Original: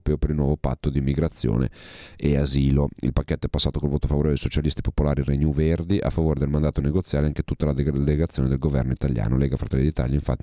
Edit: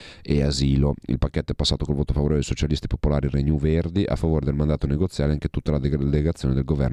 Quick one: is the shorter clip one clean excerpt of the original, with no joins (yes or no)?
yes